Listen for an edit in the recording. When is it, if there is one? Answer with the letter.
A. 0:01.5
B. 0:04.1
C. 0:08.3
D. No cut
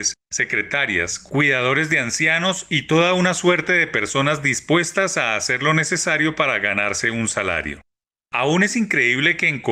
C